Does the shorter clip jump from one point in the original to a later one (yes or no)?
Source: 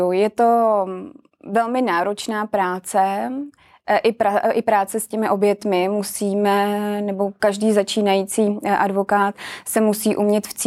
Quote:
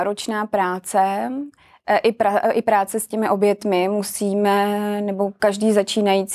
no